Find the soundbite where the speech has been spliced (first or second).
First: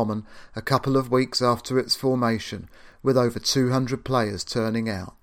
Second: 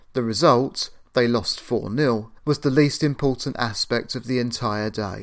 second